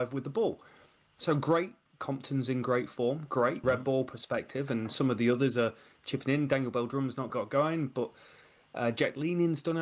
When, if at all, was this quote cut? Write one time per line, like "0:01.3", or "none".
0:03.6
0:07.3

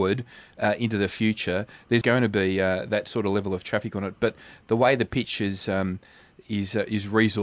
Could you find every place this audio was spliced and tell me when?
0:02.0

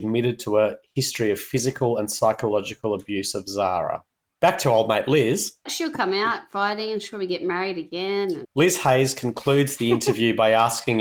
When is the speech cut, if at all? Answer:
0:05.7
0:08.4

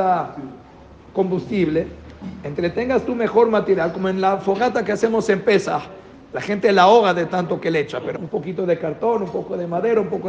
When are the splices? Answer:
0:08.2

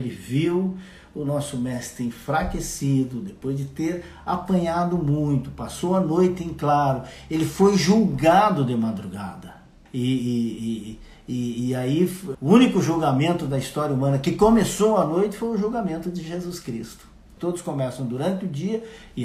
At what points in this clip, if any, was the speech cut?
0:09.9
0:12.3
0:17.4

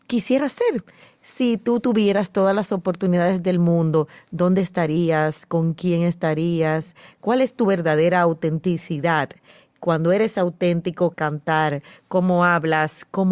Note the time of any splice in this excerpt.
0:11.1

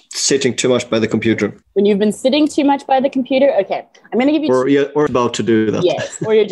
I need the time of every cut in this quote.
0:01.6
0:05.1

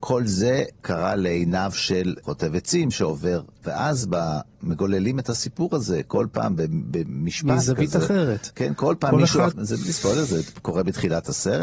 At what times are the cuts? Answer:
0:09.5

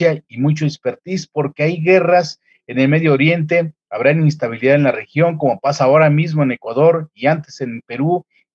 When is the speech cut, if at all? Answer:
none

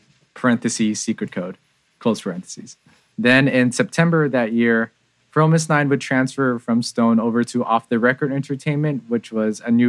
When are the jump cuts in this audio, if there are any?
0:03.1

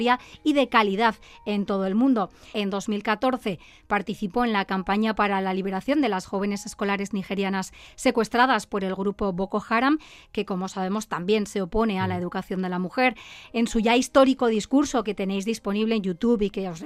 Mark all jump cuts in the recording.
0:02.5
0:13.5

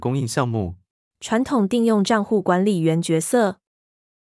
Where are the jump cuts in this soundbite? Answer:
0:01.1

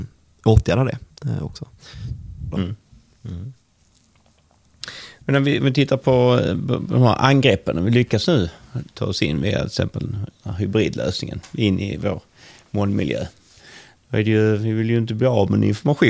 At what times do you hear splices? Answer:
0:02.5

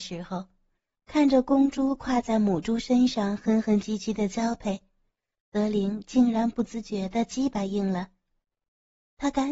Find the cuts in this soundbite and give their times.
none

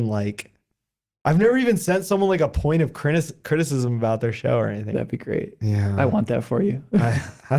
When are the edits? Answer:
0:04.9

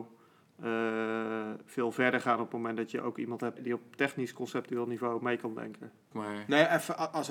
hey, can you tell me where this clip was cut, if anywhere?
0:03.6
0:06.1

